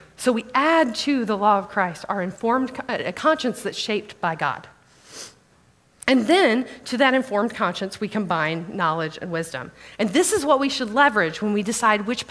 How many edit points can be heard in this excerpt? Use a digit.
0